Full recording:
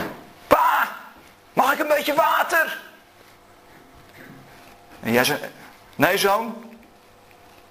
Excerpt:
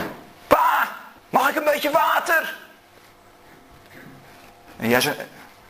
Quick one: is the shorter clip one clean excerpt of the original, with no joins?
no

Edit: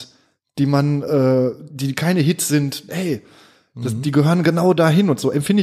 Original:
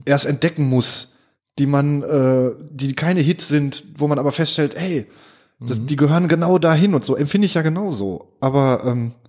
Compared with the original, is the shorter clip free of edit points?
no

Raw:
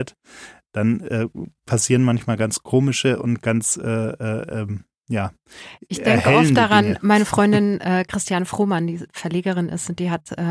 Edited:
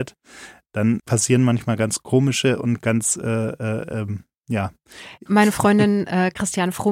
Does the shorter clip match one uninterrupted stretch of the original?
no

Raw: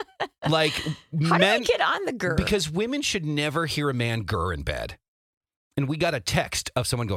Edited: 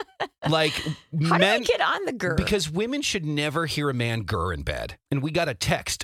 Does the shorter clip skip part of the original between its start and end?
yes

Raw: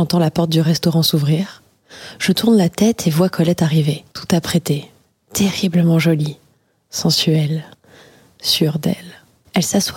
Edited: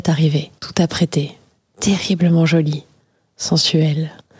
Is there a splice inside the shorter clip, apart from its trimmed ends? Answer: no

